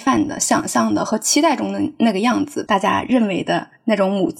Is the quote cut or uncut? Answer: cut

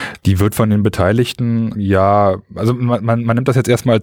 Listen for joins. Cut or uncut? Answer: cut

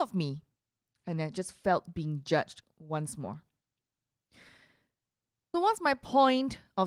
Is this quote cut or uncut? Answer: cut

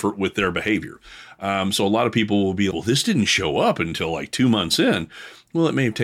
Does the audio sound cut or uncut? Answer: cut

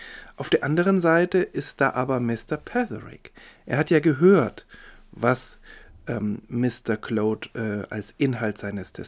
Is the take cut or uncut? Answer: uncut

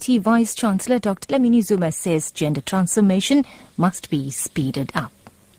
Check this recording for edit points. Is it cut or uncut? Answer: cut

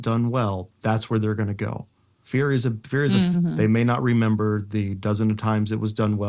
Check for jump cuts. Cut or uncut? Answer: cut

